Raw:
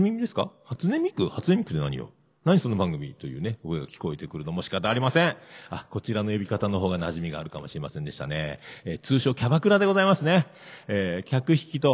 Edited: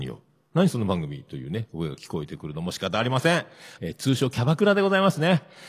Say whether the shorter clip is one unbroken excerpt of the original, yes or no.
no